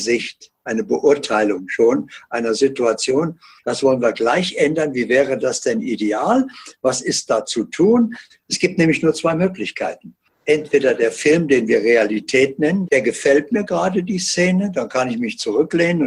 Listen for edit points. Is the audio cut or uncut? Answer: cut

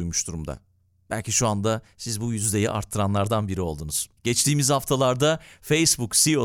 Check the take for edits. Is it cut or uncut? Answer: uncut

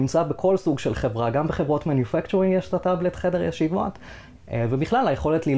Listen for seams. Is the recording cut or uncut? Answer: cut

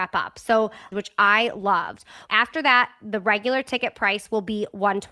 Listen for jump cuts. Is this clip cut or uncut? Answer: cut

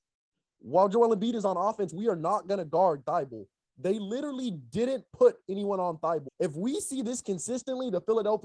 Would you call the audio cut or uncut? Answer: cut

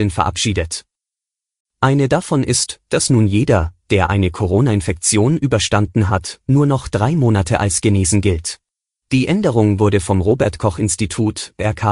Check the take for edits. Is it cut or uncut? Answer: cut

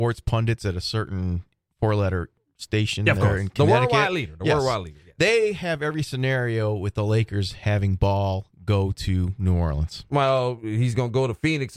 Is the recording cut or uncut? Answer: uncut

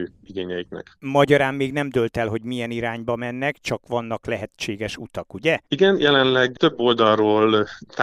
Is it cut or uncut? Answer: uncut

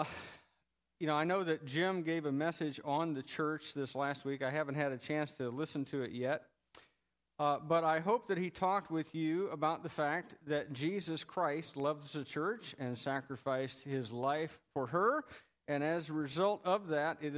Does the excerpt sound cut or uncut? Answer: uncut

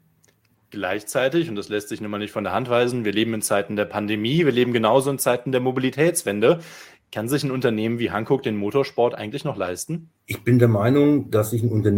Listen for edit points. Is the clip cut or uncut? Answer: cut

